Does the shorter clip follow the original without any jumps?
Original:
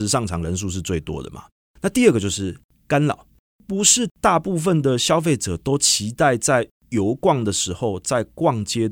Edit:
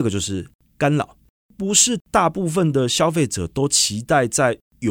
yes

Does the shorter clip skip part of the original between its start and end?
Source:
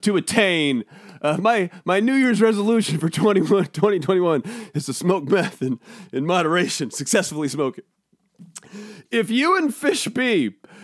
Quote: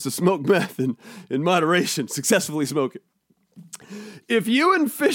no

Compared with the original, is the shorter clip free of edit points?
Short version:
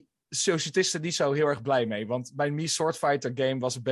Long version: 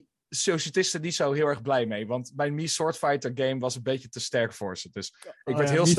yes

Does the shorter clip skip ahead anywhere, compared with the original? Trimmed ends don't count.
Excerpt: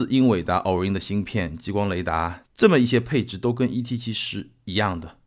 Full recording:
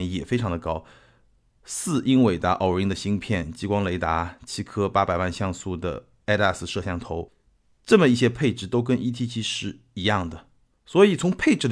yes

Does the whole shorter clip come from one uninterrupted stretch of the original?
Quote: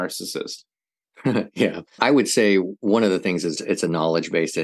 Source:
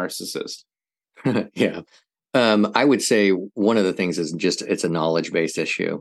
no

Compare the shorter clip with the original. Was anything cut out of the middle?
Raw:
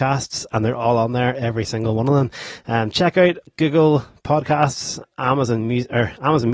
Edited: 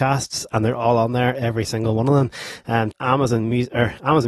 yes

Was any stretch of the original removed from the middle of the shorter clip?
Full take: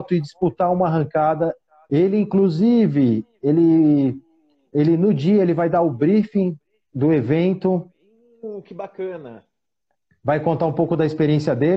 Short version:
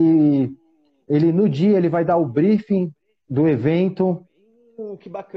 no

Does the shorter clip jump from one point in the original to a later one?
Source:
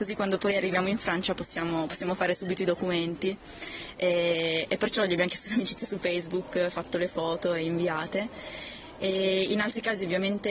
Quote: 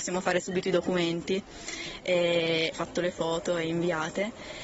yes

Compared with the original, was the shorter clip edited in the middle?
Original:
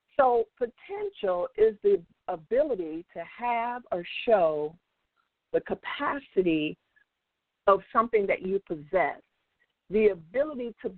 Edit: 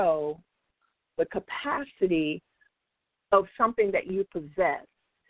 no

